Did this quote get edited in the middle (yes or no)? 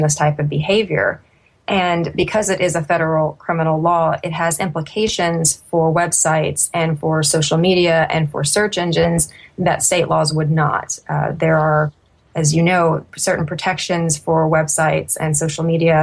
no